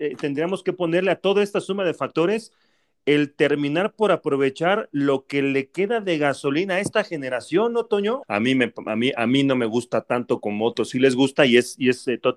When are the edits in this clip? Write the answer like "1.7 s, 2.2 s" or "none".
8.2 s